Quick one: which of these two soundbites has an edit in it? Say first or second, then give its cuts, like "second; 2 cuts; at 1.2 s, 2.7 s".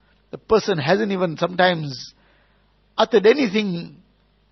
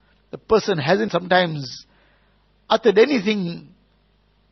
second; 1 cut; at 1.1 s